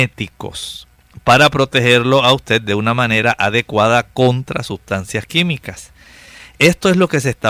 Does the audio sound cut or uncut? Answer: uncut